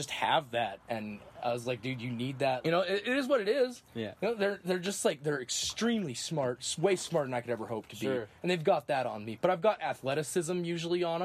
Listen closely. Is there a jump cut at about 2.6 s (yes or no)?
yes